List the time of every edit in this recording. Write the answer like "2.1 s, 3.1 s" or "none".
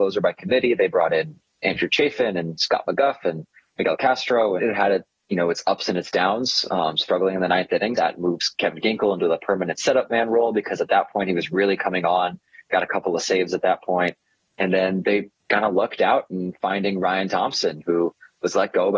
4.6 s, 8.0 s, 15.4 s